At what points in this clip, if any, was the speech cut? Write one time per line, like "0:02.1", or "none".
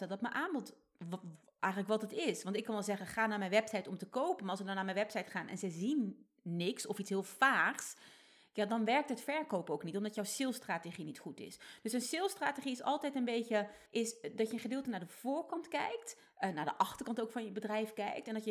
0:13.9

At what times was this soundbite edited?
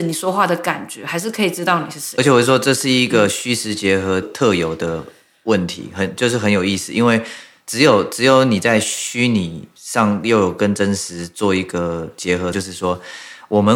0:04.2
0:12.5

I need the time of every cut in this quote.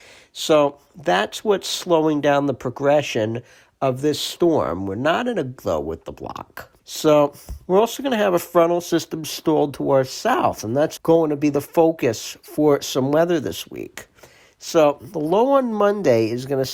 0:05.6
0:06.8
0:11.0

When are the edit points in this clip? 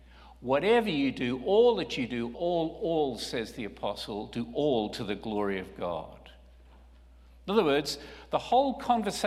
0:02.3

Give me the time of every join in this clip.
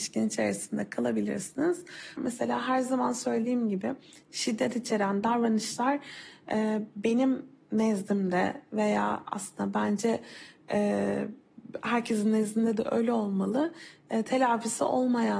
0:02.2

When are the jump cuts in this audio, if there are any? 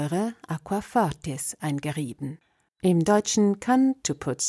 0:02.7

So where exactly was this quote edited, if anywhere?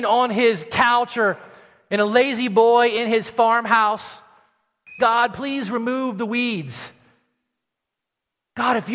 0:05.0

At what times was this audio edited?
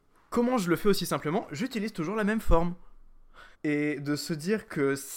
0:03.5

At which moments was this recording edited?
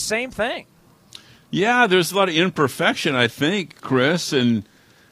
none

